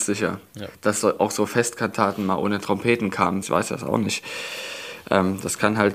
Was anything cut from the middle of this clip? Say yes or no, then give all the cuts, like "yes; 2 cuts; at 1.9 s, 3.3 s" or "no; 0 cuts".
yes; 1 cut; at 3.4 s